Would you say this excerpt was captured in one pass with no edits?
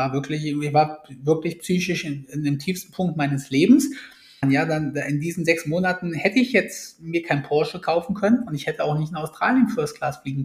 no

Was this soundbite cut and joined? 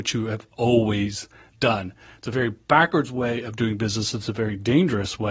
no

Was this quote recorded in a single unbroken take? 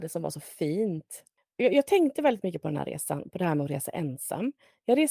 yes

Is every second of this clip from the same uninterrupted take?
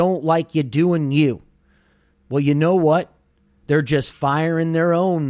yes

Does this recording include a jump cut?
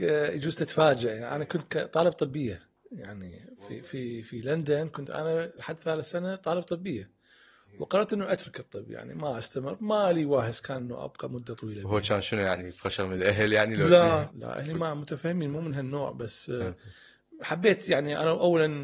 yes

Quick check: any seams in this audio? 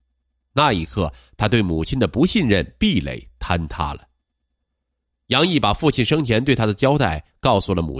no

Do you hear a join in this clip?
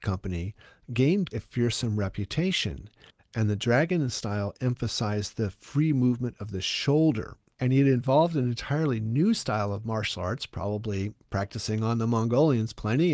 yes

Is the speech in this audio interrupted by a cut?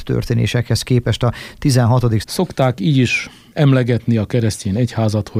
yes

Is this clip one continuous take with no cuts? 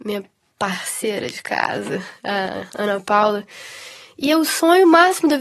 yes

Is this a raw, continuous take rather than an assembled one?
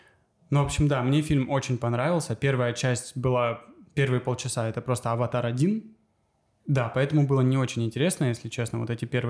no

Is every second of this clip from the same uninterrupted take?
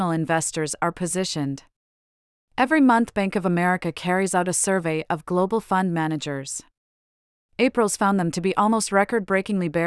yes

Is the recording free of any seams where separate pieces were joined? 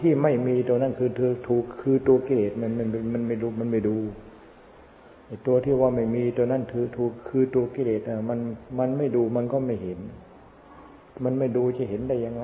yes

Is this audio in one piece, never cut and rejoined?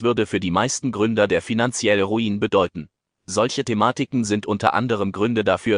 yes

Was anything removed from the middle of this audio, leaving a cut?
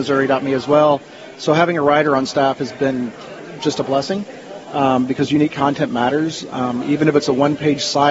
no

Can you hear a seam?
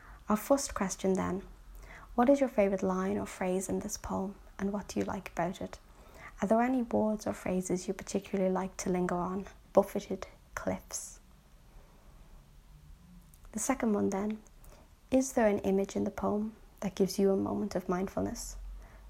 yes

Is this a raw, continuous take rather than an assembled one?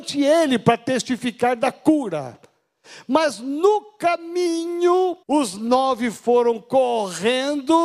no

